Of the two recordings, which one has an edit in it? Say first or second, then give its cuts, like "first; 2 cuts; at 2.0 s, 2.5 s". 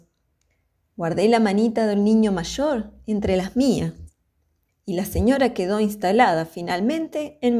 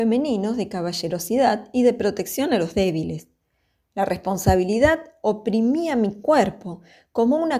first; 1 cut; at 4.7 s